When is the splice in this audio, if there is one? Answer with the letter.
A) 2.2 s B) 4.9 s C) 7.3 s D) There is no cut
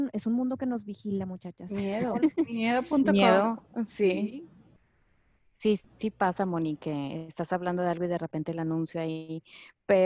A